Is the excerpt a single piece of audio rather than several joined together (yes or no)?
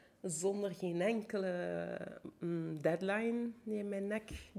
yes